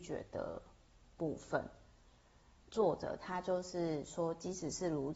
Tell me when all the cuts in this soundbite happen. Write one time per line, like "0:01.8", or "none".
0:02.7